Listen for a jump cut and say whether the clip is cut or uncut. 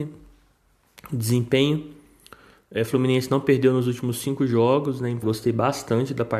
cut